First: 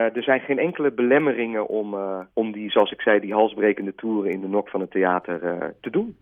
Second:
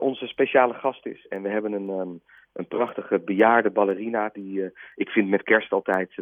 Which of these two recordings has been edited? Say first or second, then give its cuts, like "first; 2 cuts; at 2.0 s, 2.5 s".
first; 1 cut; at 2.3 s